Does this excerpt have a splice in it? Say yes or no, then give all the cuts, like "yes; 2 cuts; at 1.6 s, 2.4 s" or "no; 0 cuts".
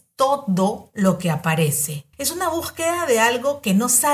yes; 1 cut; at 2.1 s